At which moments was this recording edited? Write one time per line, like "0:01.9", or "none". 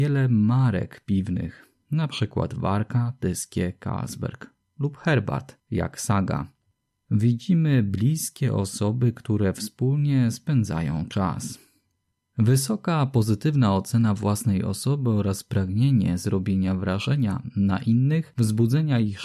none